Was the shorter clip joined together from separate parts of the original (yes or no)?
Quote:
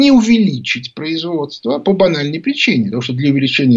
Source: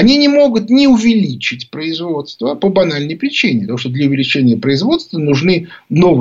no